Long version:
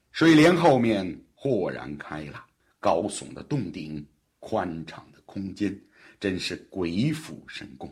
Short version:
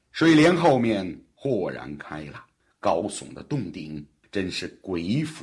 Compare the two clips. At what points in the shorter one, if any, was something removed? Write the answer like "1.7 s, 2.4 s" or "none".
4.2 s